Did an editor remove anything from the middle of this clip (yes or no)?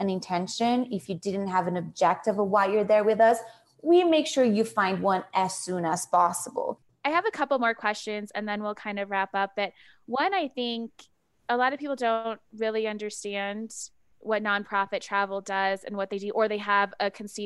no